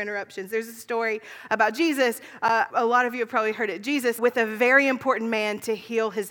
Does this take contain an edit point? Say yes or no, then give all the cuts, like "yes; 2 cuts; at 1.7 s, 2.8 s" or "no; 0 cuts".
yes; 2 cuts; at 2.7 s, 4.2 s